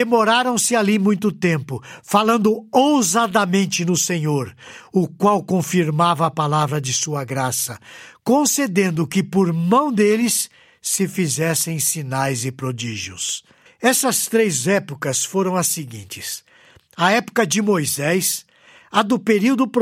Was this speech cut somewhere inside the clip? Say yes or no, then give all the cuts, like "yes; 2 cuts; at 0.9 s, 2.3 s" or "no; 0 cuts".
yes; 1 cut; at 13.7 s